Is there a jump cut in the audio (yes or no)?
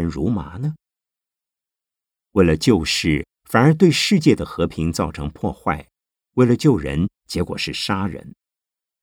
no